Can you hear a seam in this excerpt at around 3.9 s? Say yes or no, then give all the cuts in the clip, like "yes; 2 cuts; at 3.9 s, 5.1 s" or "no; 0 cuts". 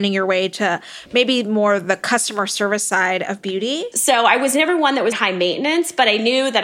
yes; 2 cuts; at 3.9 s, 5.1 s